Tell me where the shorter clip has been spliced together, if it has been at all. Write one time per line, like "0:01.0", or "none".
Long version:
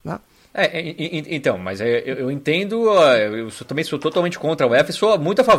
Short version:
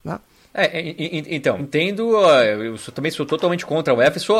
0:01.6